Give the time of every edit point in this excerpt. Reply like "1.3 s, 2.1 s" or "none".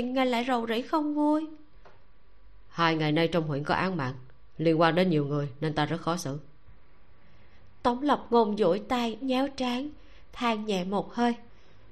9.2 s